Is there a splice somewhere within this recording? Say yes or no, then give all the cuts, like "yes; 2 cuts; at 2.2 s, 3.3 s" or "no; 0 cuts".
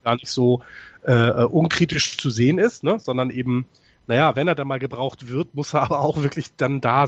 no; 0 cuts